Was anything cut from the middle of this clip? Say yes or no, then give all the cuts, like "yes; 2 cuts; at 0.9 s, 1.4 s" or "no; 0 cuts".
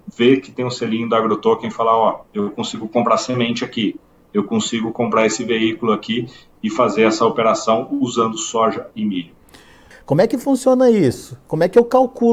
yes; 1 cut; at 9.9 s